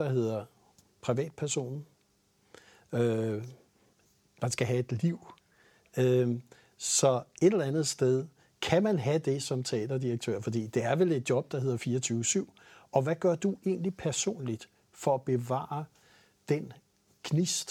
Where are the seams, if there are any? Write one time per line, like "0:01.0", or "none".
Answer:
none